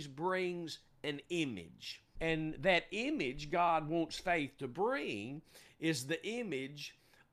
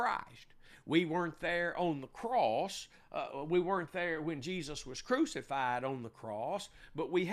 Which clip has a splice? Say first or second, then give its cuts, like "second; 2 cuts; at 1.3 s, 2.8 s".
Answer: first; 1 cut; at 2.1 s